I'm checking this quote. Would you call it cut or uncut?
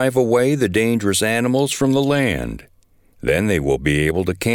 uncut